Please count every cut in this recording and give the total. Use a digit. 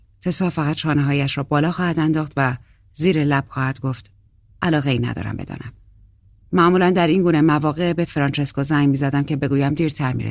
1